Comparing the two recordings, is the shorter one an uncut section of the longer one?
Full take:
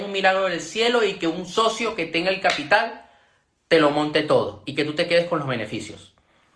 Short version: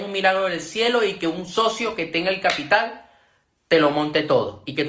yes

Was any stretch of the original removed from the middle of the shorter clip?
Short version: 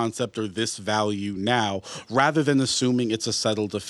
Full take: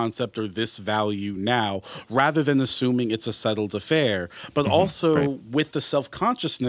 no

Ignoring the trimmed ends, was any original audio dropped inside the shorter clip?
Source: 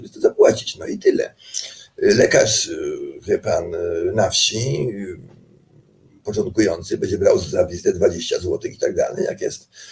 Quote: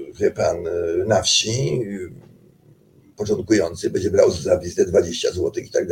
no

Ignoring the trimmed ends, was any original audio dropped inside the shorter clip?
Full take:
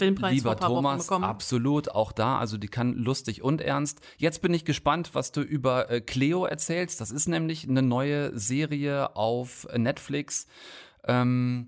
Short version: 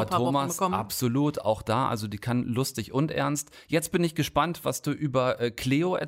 no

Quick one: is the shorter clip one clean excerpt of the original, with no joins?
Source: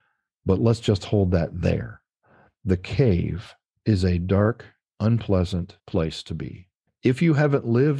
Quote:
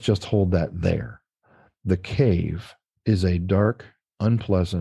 yes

